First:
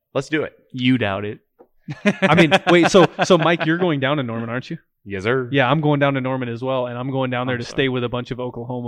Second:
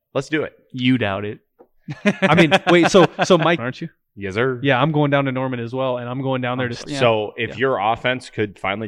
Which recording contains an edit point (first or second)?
second